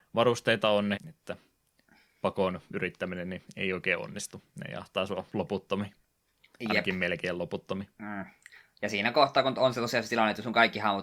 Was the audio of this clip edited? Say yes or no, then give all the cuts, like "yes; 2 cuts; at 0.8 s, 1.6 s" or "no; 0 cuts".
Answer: yes; 1 cut; at 0.9 s